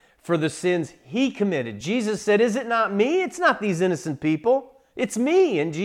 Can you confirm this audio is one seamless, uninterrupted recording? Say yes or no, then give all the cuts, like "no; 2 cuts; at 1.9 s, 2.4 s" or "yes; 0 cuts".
yes; 0 cuts